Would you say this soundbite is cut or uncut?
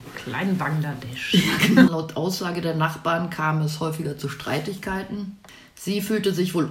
cut